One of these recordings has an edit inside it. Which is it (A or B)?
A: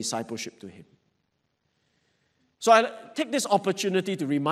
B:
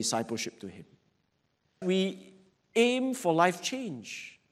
B